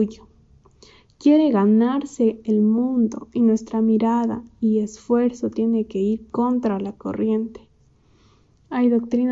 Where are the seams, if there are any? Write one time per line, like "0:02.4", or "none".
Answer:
none